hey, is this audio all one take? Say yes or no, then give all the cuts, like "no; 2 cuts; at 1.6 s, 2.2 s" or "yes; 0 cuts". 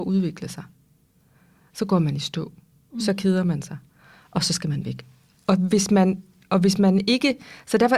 yes; 0 cuts